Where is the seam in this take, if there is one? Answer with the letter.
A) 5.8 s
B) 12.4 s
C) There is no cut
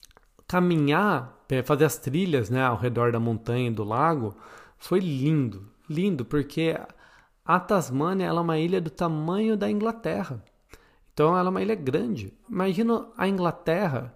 B